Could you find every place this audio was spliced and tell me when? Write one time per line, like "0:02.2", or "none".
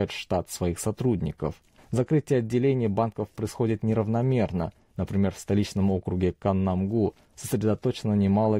0:01.8